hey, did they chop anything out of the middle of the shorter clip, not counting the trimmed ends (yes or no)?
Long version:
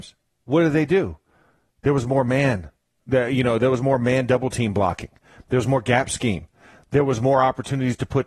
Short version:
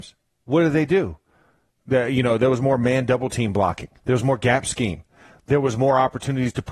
yes